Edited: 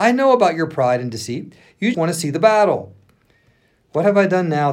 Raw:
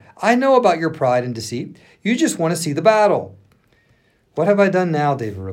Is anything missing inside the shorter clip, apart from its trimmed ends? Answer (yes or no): yes